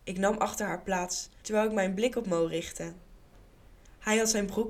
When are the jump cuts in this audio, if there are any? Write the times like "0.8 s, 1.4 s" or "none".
1.4 s